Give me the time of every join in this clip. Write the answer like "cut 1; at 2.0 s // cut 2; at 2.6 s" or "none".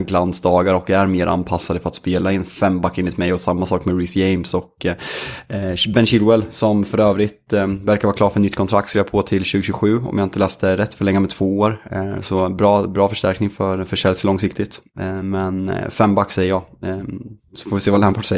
none